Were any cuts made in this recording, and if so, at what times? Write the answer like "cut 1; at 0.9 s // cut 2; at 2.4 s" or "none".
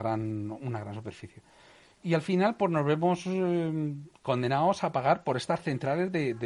none